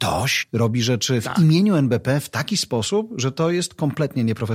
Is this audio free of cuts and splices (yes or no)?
yes